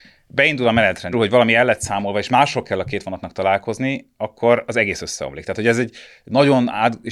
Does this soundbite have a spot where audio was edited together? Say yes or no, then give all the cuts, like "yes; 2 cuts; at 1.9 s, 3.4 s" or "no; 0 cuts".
yes; 1 cut; at 1.1 s